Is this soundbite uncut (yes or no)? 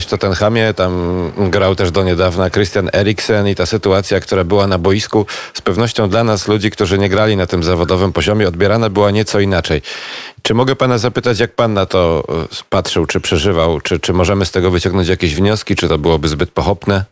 yes